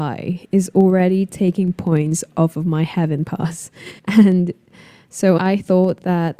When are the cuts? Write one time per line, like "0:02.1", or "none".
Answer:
0:04.0
0:05.4